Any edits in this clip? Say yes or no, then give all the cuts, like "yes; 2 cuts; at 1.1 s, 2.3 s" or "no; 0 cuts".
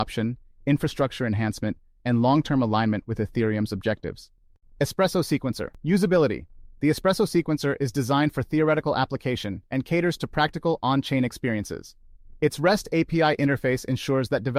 no; 0 cuts